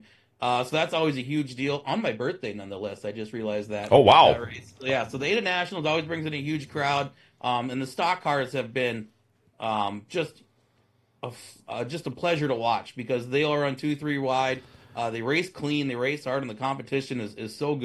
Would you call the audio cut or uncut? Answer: uncut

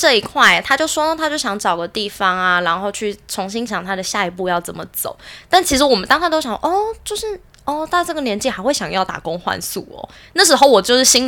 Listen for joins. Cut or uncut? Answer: cut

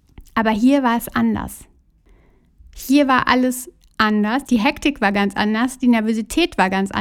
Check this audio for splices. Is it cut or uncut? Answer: cut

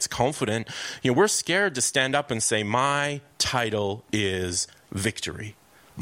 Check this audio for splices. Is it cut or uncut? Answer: uncut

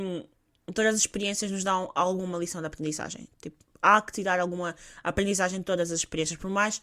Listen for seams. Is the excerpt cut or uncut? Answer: uncut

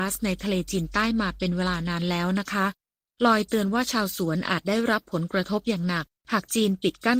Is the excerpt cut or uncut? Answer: uncut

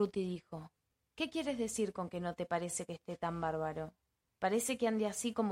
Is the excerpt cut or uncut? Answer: cut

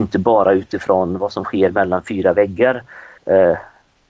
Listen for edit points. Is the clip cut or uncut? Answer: cut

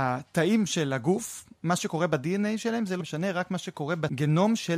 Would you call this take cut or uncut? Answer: cut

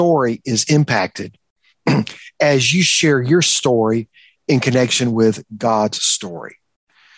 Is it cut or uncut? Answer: uncut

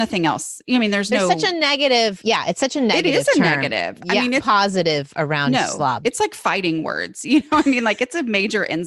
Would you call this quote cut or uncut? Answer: cut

